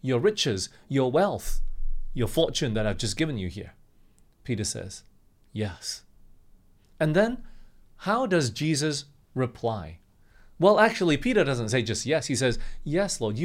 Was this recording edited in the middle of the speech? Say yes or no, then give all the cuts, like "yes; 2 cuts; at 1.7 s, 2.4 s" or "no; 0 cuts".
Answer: no; 0 cuts